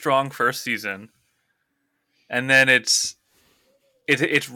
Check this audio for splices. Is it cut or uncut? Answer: uncut